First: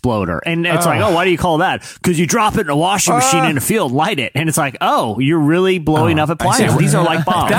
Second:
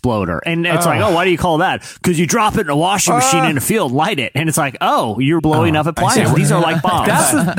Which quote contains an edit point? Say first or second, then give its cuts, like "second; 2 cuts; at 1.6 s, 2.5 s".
second; 1 cut; at 5.4 s